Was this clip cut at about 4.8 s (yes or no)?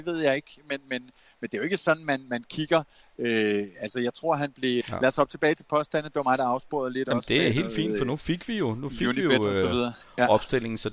yes